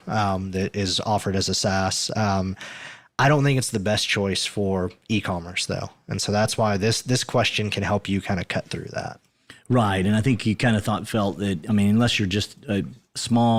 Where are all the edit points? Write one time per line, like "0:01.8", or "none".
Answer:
none